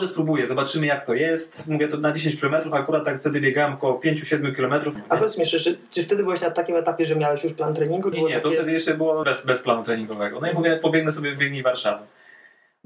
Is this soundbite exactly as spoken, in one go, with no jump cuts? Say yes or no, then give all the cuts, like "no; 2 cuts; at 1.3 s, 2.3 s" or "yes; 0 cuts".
no; 3 cuts; at 5.0 s, 8.1 s, 9.2 s